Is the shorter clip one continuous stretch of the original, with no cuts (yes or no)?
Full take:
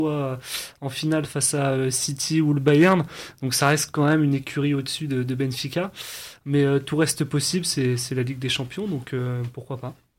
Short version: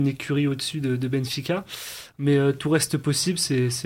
yes